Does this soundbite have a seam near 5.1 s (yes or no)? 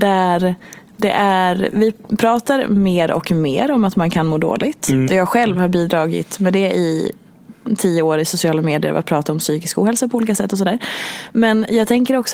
yes